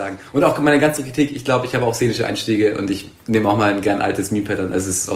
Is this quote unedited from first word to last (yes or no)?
yes